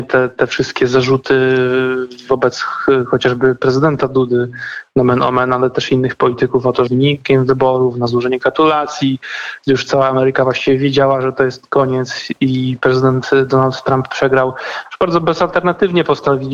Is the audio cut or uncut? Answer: cut